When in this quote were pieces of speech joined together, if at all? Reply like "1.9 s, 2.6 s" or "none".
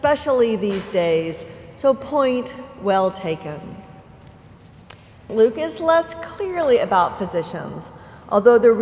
5.3 s